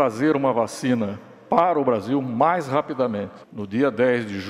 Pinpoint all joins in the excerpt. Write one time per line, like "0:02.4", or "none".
0:03.4